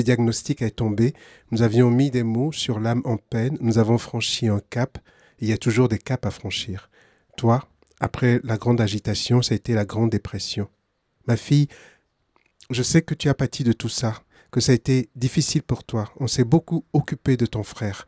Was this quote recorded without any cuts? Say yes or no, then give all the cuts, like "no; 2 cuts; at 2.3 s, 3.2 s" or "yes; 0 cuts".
yes; 0 cuts